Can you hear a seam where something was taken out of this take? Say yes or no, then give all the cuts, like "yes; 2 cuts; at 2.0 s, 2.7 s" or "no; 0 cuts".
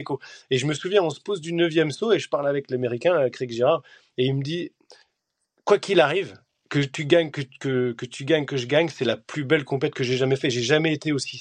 no; 0 cuts